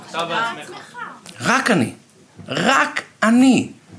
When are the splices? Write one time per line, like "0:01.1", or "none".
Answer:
none